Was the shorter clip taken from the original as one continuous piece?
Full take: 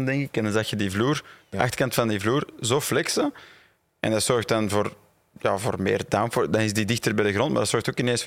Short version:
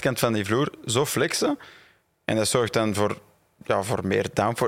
yes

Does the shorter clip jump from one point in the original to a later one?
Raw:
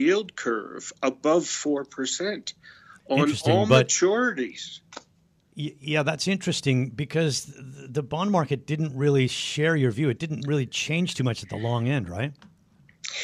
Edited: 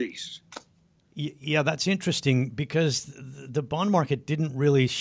no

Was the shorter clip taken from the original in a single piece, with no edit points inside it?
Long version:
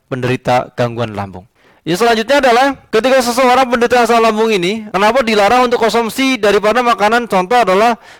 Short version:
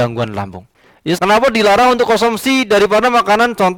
no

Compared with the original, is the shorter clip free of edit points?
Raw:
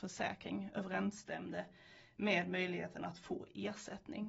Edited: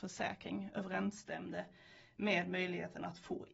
yes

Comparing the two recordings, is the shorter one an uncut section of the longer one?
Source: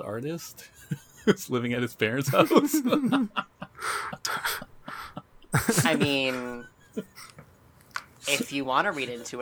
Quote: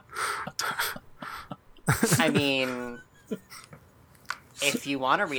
yes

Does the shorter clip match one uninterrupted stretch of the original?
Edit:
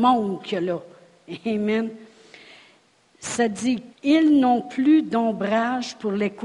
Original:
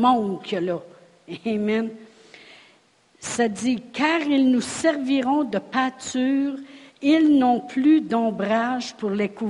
no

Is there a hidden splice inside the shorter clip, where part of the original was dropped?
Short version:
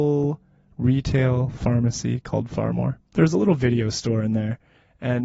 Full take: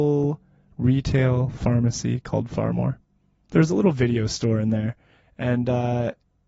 yes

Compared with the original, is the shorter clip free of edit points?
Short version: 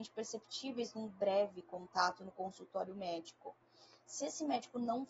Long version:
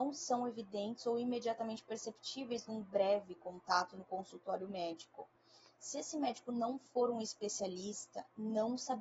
yes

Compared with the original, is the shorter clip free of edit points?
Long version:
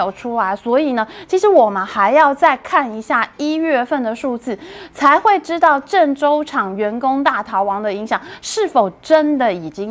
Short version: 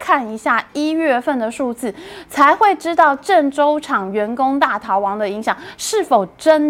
yes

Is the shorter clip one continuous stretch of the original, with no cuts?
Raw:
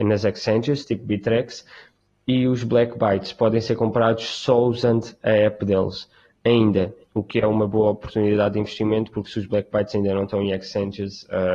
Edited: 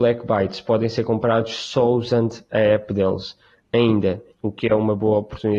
yes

